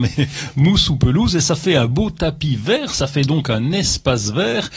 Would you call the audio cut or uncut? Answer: uncut